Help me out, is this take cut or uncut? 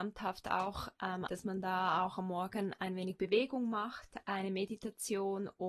cut